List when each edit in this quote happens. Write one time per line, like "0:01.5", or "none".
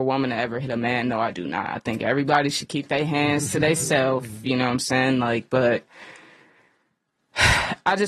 none